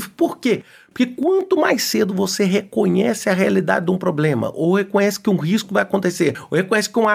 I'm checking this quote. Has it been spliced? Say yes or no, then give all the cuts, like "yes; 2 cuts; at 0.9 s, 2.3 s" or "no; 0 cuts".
no; 0 cuts